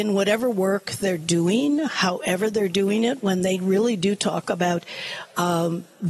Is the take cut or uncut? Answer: uncut